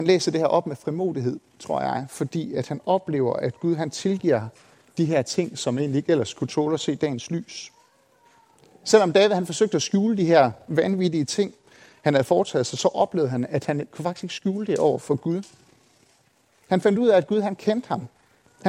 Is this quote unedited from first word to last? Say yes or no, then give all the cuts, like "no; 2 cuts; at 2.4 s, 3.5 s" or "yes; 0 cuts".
yes; 0 cuts